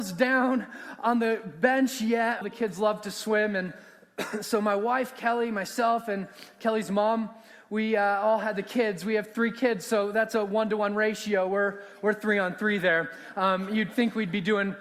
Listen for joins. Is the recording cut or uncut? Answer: cut